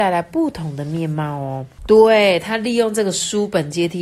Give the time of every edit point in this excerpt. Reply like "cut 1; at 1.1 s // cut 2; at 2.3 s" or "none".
cut 1; at 1.8 s